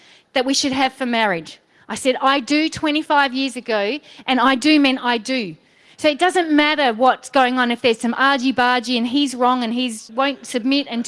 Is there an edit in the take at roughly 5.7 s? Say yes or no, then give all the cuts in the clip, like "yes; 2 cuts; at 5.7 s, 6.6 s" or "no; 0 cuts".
no; 1 cut; at 10.1 s